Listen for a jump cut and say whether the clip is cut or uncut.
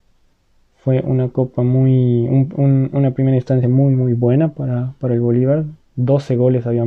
uncut